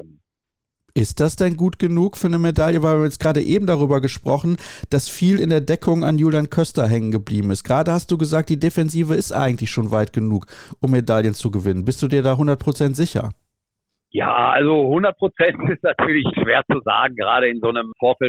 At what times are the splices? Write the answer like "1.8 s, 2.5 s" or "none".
none